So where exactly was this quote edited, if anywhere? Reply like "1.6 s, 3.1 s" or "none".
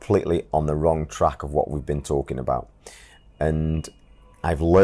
none